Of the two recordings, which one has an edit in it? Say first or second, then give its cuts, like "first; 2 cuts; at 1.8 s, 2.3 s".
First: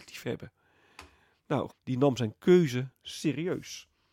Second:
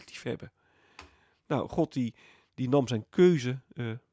first; 2 cuts; at 1.7 s, 2.9 s